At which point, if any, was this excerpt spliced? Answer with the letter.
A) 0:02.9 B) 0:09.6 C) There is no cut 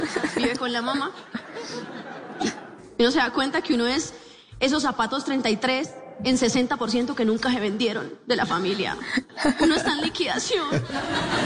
C